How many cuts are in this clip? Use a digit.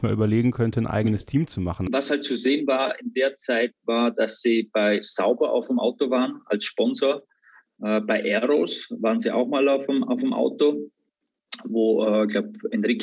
1